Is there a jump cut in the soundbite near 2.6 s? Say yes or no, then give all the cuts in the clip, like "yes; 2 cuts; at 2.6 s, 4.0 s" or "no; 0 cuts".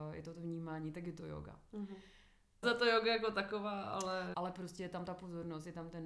yes; 2 cuts; at 2.6 s, 4.3 s